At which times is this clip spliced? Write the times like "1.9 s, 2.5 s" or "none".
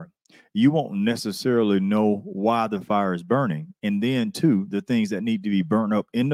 none